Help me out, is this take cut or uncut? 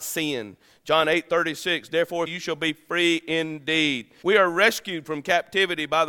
cut